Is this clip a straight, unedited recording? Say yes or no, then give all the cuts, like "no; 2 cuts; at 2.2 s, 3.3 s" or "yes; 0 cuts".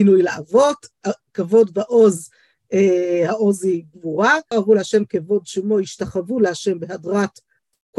no; 1 cut; at 4.5 s